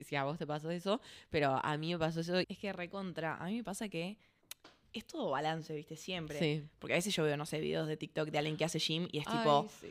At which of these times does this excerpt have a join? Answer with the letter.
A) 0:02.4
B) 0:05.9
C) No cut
A